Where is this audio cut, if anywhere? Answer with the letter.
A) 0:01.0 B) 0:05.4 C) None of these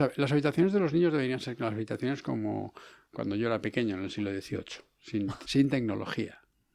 B